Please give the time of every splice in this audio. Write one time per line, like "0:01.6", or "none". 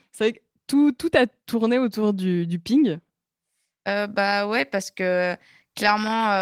none